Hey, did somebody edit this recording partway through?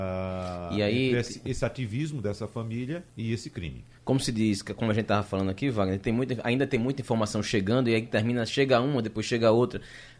yes; 1 cut; at 3.1 s

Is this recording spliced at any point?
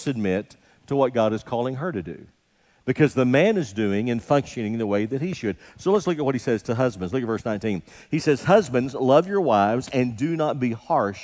no; 0 cuts

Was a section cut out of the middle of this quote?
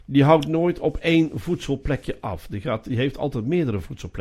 no; 0 cuts

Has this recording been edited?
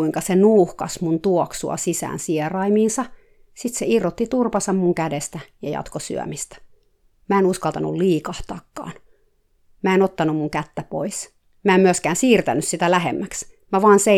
no; 0 cuts

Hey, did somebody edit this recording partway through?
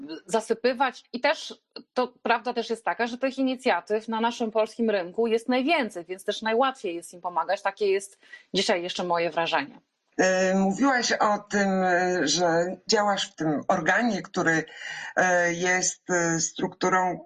no; 0 cuts

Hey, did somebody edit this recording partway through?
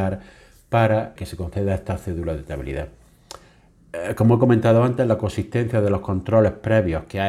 yes; 1 cut; at 1.2 s

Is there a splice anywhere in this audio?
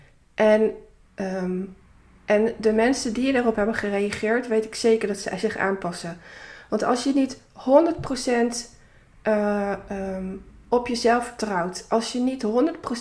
yes; 1 cut; at 1.0 s

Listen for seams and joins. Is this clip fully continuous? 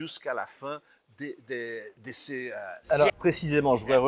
no; 2 cuts; at 2.0 s, 3.1 s

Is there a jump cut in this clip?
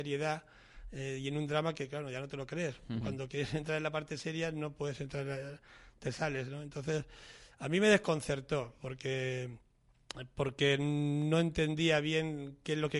no; 0 cuts

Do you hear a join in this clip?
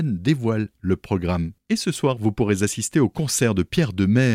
yes; 1 cut; at 1.6 s

